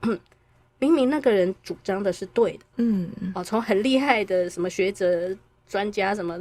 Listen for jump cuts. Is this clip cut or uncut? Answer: cut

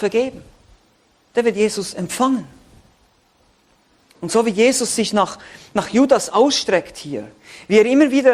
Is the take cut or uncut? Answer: uncut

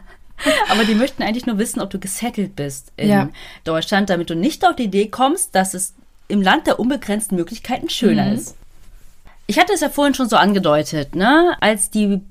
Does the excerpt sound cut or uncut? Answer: uncut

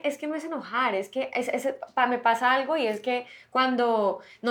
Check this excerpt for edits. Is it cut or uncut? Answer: uncut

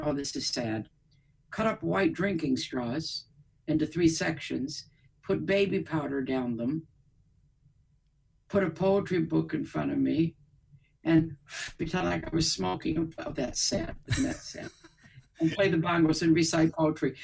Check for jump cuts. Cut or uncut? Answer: uncut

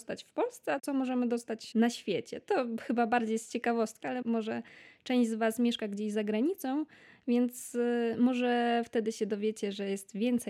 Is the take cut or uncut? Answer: cut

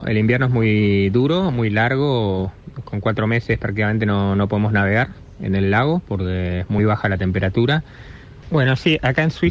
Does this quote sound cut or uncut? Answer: cut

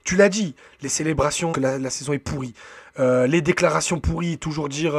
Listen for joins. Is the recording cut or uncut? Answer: cut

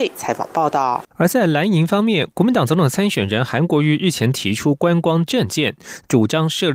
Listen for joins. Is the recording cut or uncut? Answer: cut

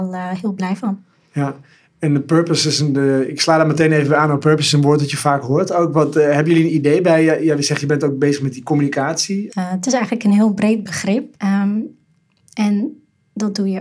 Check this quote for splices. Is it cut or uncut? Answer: cut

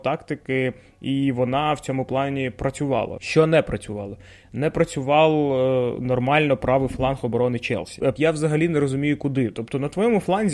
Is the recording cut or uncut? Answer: cut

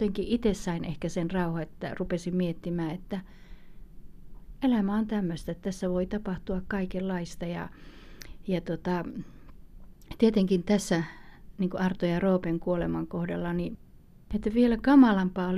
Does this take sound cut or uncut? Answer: cut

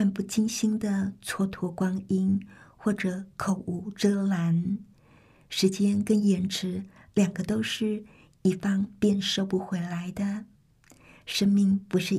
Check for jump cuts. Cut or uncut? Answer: uncut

